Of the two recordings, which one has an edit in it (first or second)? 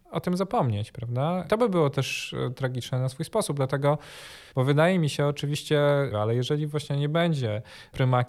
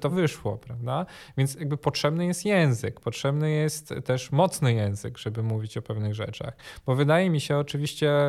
first